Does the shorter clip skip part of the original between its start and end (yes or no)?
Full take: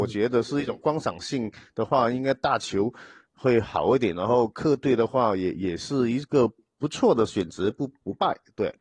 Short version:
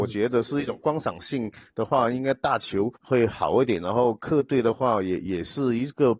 yes